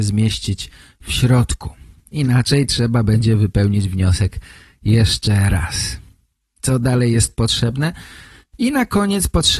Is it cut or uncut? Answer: cut